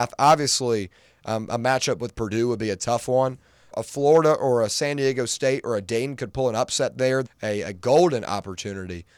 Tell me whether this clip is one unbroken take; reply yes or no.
no